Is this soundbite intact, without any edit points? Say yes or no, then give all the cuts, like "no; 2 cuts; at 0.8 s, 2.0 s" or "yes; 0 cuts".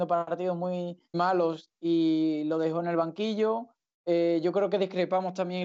no; 1 cut; at 1.1 s